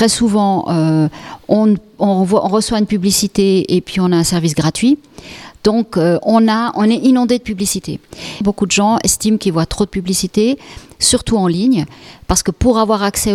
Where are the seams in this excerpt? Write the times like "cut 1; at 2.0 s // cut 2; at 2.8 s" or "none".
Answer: cut 1; at 8.4 s